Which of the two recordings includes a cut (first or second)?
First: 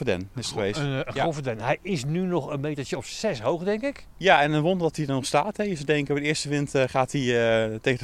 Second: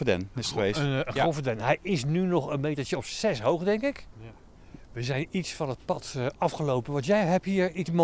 second